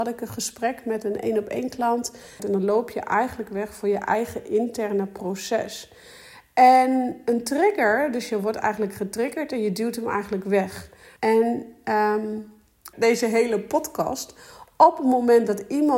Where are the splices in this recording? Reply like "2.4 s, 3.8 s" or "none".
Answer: 2.4 s, 11.2 s, 12.9 s